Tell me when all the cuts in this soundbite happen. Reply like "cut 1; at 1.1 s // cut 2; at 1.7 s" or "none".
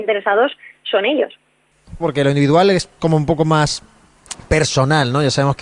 cut 1; at 2.0 s